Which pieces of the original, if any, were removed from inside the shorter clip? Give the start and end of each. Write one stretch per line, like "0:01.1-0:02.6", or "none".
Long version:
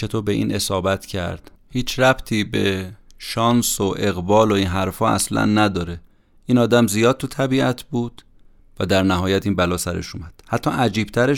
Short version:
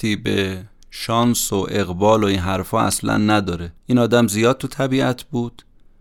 0:06.1-0:06.4